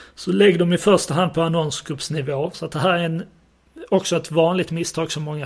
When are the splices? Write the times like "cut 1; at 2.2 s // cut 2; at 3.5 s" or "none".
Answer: cut 1; at 2.5 s